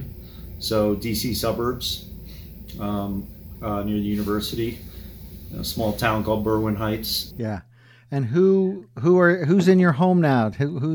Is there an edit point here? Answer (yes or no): yes